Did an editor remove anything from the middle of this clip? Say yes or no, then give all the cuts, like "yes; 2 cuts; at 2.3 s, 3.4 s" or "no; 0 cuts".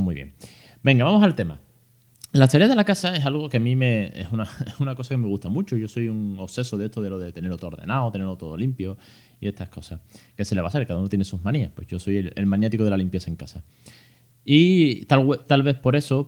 no; 0 cuts